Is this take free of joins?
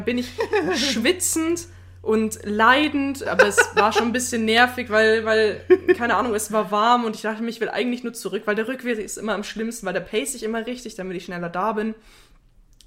no; 1 cut; at 3.3 s

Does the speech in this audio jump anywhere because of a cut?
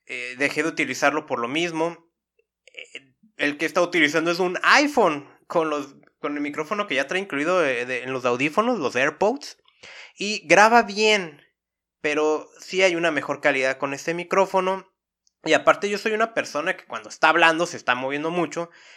no; 0 cuts

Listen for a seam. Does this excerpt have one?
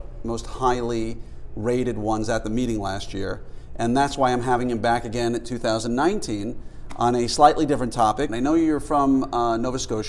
yes; 1 cut; at 8.3 s

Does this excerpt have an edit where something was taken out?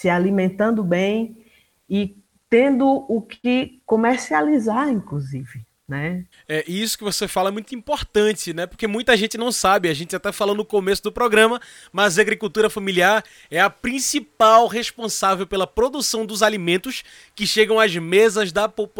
yes; 1 cut; at 6.3 s

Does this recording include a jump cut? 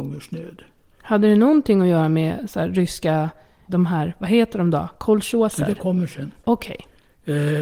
yes; 1 cut; at 3.7 s

